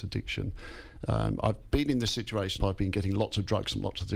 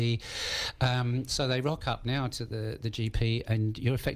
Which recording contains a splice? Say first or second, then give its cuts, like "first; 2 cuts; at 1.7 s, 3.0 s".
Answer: first; 1 cut; at 2.6 s